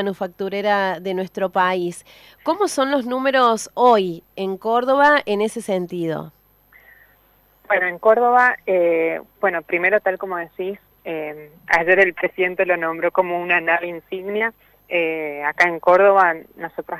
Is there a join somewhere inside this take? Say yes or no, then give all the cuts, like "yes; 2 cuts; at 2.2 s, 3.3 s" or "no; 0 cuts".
no; 0 cuts